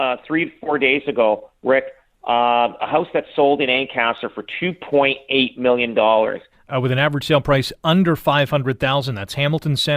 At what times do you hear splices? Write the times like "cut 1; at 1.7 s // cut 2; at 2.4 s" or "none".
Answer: cut 1; at 2.8 s // cut 2; at 6.5 s